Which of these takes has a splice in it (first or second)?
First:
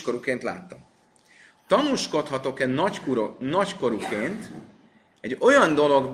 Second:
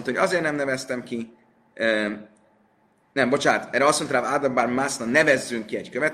first